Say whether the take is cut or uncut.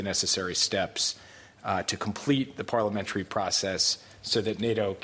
uncut